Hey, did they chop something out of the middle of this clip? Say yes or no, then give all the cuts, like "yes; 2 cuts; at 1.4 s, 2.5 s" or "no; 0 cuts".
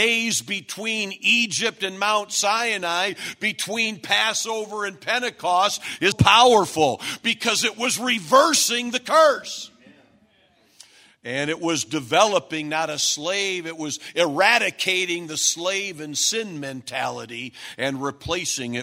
yes; 1 cut; at 6.1 s